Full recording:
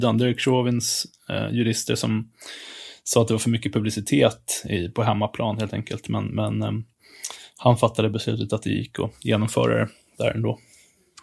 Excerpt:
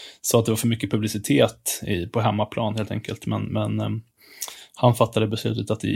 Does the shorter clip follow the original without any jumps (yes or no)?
yes